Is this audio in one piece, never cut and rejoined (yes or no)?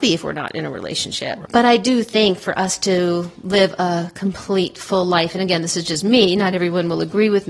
yes